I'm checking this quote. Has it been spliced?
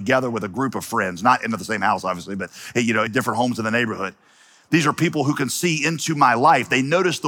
yes; 1 cut; at 3.1 s

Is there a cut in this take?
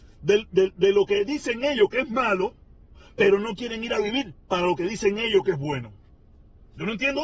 no; 0 cuts

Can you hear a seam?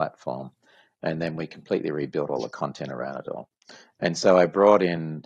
no; 0 cuts

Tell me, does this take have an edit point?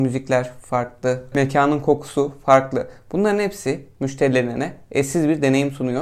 yes; 1 cut; at 1.3 s

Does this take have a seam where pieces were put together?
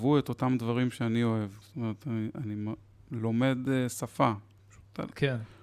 yes; 2 cuts; at 1.6 s, 4.6 s

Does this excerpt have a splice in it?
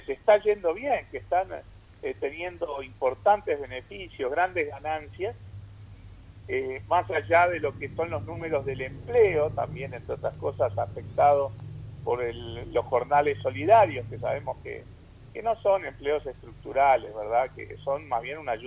no; 0 cuts

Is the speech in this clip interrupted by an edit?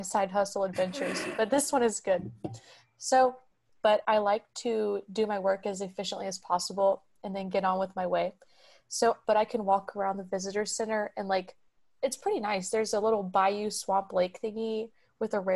yes; 2 cuts; at 3.8 s, 9.2 s

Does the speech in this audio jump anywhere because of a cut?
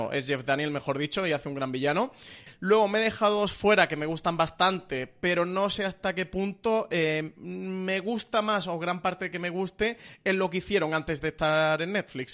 yes; 1 cut; at 2.5 s

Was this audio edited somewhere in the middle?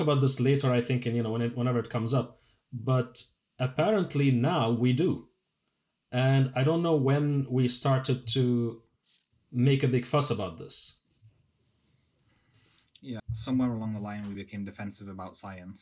yes; 2 cuts; at 13.2 s, 14.3 s

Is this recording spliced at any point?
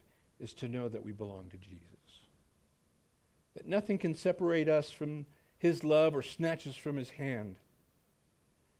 no; 0 cuts

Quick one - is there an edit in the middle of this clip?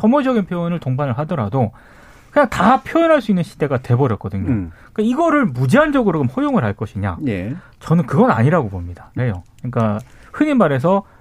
yes; 1 cut; at 9.2 s

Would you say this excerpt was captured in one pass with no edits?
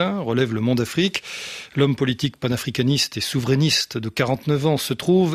yes; 0 cuts

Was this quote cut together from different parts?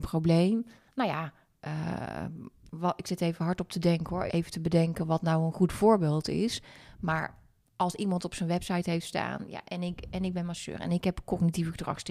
yes; 1 cut; at 4.3 s

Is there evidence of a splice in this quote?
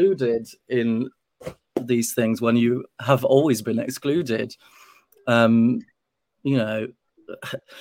no; 0 cuts

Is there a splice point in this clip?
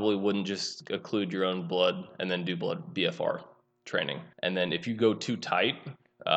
yes; 1 cut; at 4.3 s

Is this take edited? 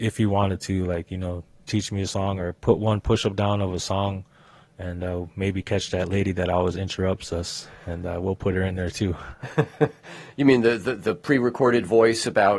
yes; 1 cut; at 2.6 s

